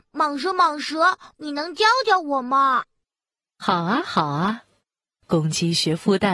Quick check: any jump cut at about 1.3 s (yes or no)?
yes